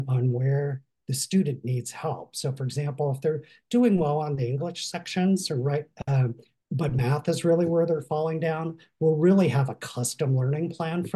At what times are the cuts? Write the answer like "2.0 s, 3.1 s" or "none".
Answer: 6.6 s

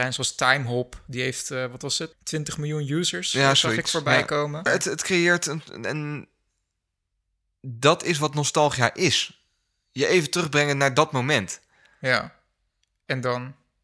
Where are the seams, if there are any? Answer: 2.1 s, 4.7 s

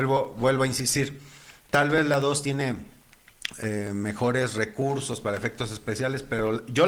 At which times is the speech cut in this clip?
none

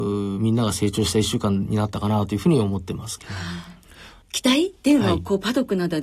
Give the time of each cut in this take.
4.2 s

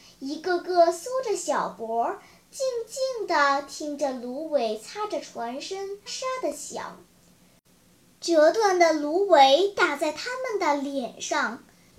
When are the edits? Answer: 6.1 s

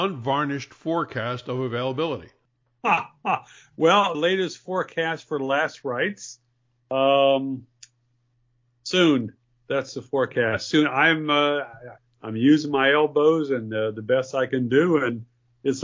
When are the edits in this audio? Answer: 4.1 s

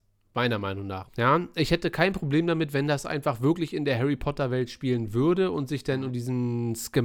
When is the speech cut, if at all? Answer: 1.0 s

